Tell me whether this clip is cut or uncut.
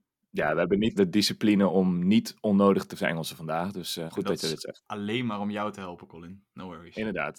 cut